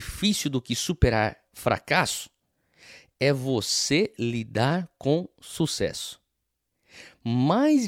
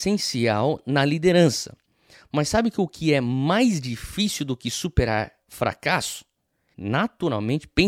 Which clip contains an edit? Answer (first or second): second